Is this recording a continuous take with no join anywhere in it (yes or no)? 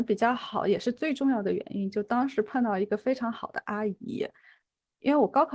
yes